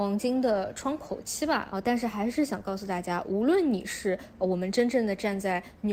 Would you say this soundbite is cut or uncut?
cut